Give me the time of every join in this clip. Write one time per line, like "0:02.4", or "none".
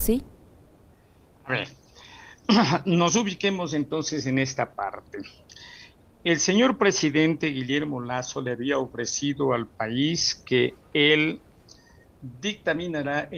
none